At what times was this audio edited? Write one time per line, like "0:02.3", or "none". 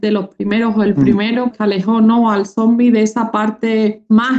0:01.5